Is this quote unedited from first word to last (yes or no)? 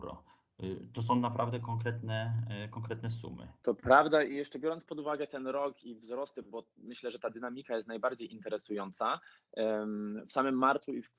yes